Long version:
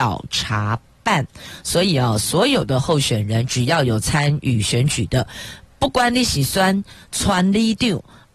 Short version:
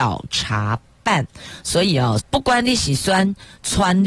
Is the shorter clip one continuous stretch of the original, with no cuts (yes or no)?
no